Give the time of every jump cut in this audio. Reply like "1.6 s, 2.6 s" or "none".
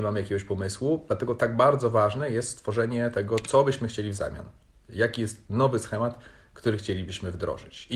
none